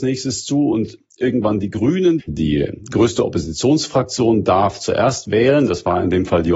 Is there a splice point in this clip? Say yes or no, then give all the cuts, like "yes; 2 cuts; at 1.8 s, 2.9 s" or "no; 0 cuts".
yes; 1 cut; at 2.2 s